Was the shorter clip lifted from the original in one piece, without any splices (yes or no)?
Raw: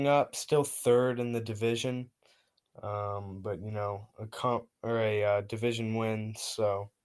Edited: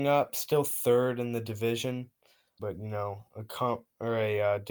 no